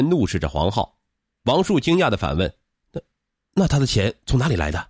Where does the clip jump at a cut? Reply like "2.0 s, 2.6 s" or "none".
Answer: none